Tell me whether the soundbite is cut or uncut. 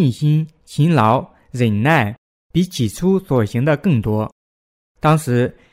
cut